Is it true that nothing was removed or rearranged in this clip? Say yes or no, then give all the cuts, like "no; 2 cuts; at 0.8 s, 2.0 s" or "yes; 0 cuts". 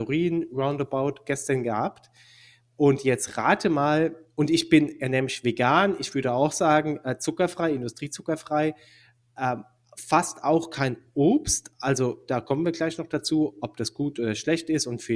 yes; 0 cuts